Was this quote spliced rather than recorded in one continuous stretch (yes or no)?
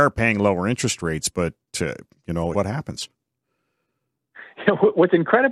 yes